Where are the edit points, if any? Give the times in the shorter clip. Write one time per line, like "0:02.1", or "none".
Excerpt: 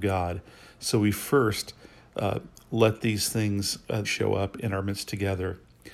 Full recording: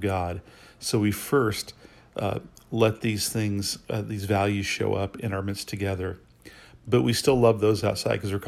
0:04.0